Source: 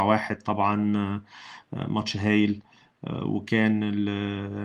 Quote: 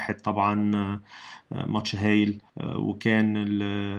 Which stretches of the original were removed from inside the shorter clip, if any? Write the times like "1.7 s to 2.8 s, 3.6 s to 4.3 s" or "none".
2.7 s to 3.0 s